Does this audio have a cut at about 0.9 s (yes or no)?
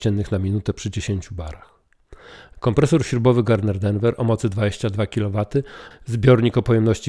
no